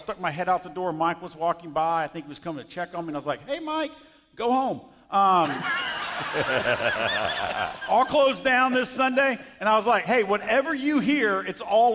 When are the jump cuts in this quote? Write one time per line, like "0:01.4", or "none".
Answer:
none